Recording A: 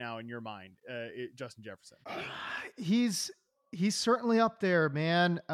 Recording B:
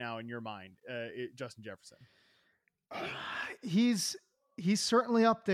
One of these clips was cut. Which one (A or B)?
A